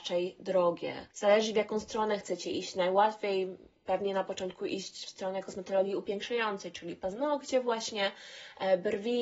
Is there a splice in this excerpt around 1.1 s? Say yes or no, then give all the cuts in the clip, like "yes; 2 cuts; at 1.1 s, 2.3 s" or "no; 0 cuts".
yes; 1 cut; at 1.1 s